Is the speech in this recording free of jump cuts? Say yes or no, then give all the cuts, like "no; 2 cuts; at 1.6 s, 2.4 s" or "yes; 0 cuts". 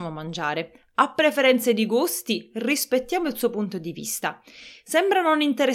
yes; 0 cuts